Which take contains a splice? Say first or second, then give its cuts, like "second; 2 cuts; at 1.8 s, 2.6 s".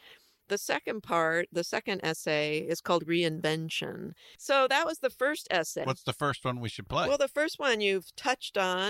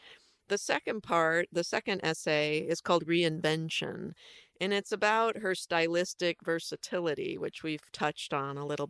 first; 2 cuts; at 4.3 s, 5.8 s